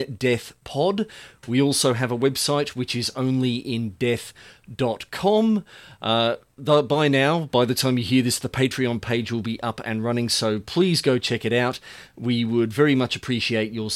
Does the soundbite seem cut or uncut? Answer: uncut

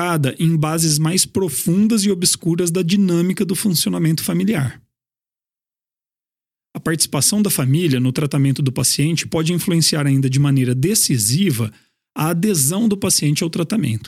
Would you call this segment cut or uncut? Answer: uncut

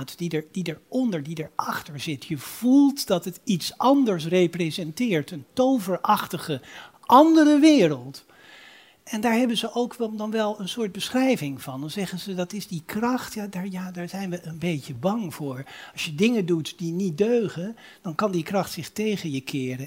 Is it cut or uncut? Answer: uncut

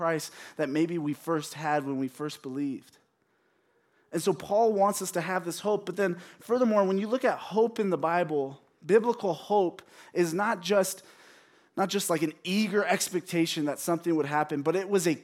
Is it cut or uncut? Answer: uncut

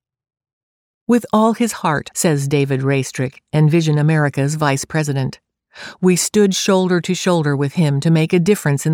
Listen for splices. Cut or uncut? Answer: cut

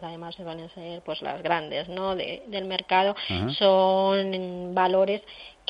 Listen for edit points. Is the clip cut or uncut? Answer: uncut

